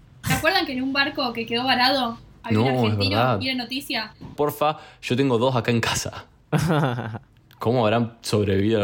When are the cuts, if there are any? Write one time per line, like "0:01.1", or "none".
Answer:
0:04.4

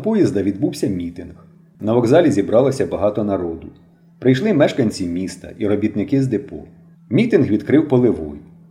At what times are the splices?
0:06.9

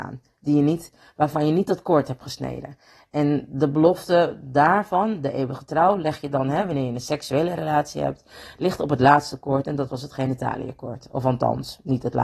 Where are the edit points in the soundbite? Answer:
none

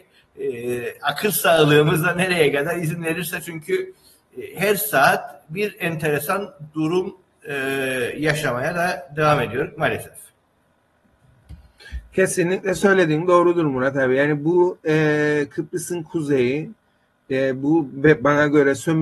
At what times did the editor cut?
none

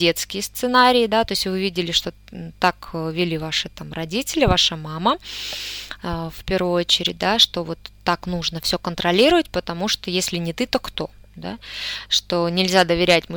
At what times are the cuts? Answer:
none

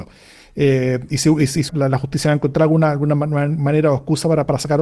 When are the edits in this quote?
0:01.7

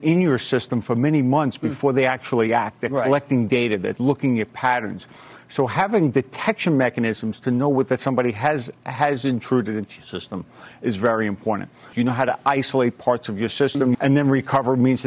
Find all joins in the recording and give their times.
0:11.9
0:13.9

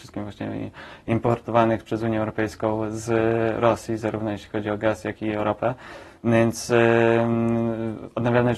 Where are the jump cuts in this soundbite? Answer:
none

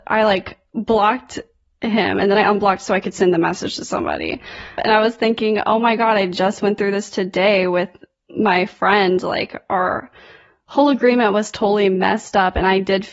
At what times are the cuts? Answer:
0:04.8

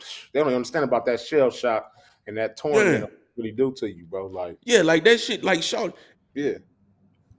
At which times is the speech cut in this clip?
0:06.1

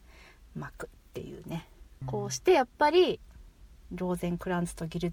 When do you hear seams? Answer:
0:02.0

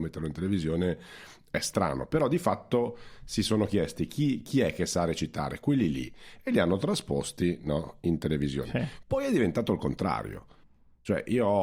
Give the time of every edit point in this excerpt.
0:09.0

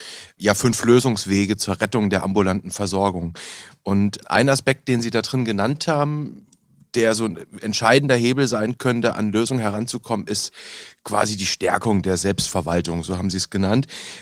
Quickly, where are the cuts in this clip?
none

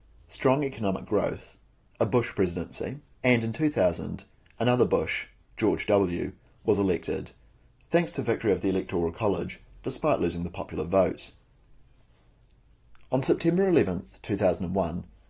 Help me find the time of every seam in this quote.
0:03.1

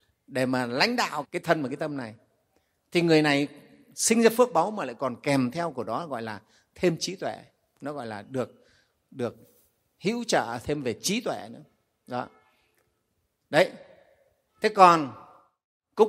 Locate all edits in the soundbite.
0:01.2

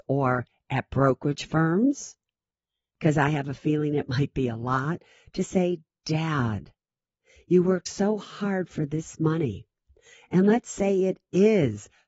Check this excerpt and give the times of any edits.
none

